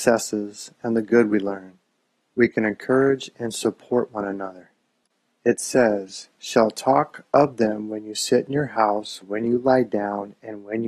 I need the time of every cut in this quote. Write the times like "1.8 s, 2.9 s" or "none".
5.3 s, 9.2 s